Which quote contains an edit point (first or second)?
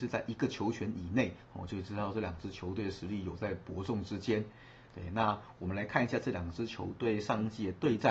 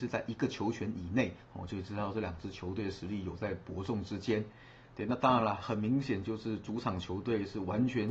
first